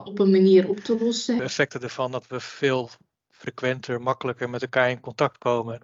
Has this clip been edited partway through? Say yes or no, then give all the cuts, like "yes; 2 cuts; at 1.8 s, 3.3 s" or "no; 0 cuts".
yes; 1 cut; at 1.4 s